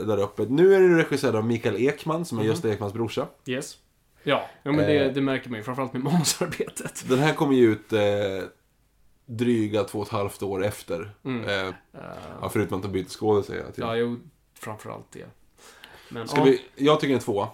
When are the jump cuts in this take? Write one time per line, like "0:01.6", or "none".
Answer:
0:04.2
0:11.7